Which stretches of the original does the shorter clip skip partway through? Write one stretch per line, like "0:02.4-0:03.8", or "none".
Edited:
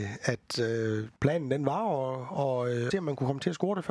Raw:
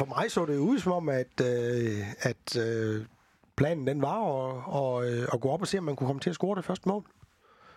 0:03.1-0:03.5
0:05.3-0:05.7